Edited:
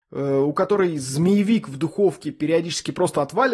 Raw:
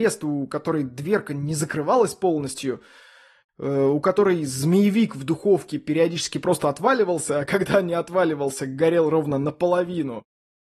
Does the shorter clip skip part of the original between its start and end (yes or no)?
no